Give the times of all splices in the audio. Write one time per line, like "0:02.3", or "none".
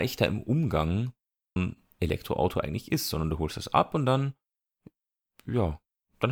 0:01.6